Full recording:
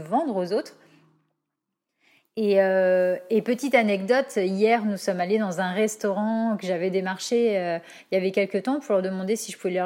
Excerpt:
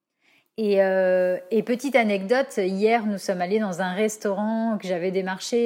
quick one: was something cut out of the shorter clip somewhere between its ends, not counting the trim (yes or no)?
no